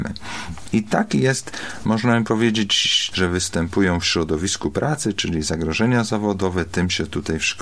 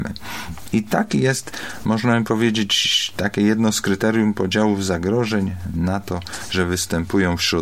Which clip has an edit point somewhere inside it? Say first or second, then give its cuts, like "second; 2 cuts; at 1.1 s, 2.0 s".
first; 1 cut; at 3.1 s